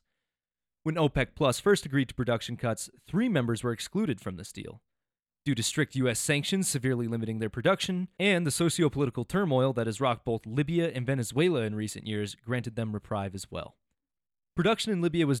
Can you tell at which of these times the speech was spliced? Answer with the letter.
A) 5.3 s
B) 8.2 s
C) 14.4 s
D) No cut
B